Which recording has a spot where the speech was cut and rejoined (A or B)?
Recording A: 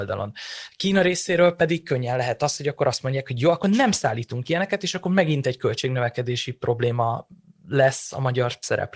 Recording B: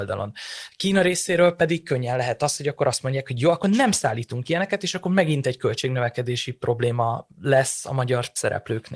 B